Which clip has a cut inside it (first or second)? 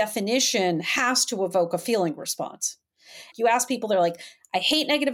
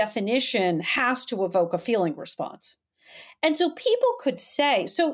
first